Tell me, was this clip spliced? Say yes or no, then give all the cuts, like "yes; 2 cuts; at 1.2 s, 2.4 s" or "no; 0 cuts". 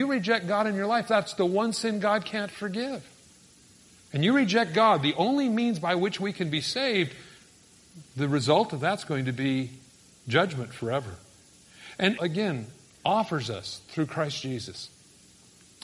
yes; 1 cut; at 12.2 s